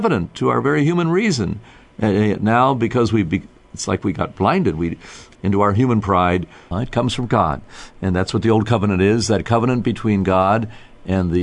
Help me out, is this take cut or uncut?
cut